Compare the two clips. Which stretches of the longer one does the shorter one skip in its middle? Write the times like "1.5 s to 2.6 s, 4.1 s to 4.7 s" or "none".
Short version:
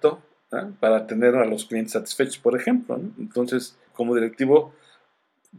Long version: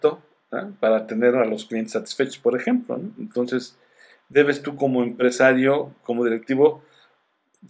3.9 s to 6.0 s